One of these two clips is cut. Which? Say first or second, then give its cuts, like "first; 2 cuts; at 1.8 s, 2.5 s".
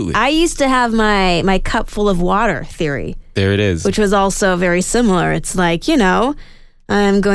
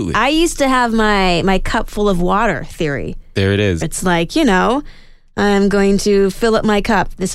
second; 1 cut; at 3.8 s